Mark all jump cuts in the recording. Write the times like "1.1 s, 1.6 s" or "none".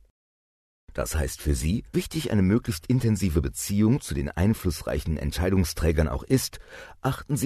1.9 s

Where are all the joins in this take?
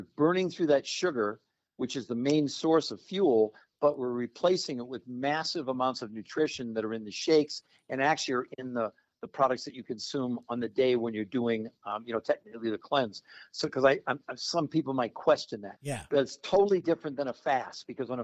15.8 s

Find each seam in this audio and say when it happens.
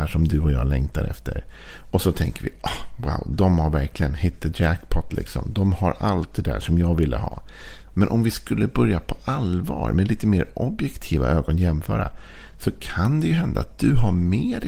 7.9 s

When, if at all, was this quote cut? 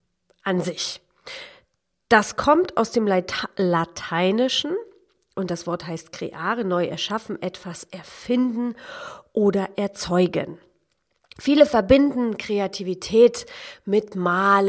none

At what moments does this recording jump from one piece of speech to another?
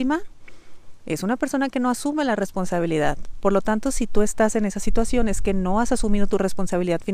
none

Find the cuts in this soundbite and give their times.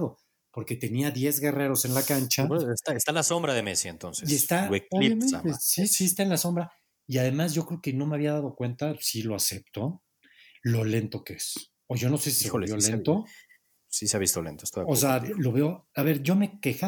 15.9 s

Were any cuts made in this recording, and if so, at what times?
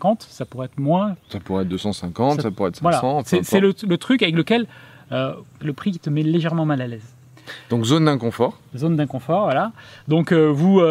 5.6 s

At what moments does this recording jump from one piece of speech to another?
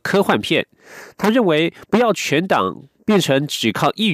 none

